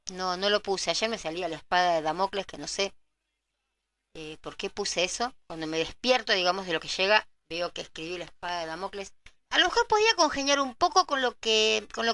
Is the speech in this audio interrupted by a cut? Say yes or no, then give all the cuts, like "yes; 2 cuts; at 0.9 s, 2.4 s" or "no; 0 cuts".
yes; 2 cuts; at 5.4 s, 9.4 s